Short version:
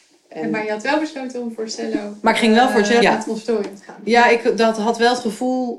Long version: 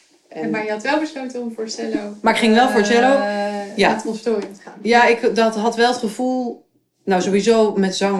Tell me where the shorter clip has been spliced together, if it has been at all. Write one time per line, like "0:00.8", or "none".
0:03.0